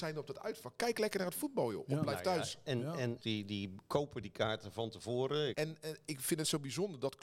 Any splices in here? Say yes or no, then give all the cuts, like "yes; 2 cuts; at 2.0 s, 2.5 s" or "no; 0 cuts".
yes; 2 cuts; at 3.2 s, 5.5 s